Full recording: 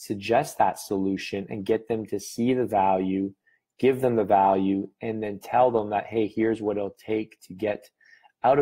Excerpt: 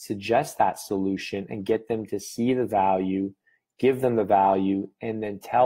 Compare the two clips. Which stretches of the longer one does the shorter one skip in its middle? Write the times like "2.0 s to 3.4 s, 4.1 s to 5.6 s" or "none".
none